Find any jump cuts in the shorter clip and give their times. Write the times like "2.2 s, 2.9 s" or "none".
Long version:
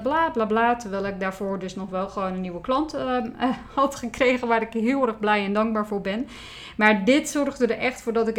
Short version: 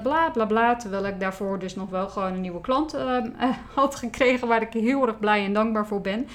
none